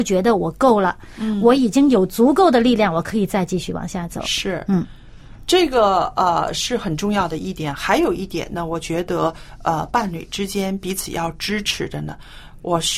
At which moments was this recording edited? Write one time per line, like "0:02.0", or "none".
none